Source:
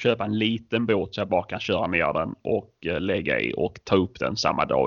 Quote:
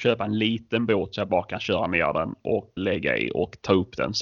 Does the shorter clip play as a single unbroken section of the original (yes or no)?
no